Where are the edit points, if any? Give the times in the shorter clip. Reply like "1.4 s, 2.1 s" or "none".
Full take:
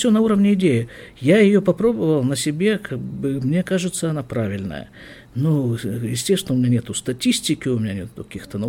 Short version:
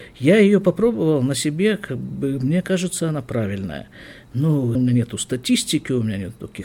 4.7 s